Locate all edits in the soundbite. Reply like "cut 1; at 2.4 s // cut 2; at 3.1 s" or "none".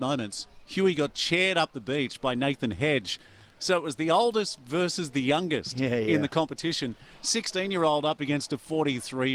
none